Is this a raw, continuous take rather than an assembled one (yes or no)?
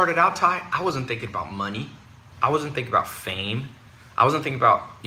yes